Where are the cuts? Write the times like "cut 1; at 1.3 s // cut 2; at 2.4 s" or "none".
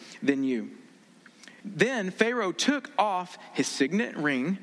cut 1; at 1.6 s